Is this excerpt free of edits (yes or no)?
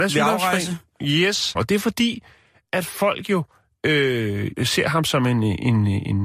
no